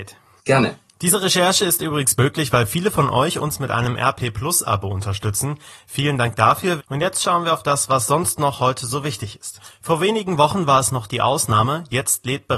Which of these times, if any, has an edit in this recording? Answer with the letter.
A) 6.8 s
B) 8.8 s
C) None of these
A